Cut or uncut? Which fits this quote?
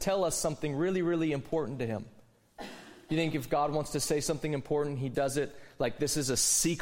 uncut